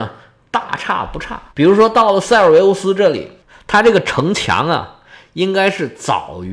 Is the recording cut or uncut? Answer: cut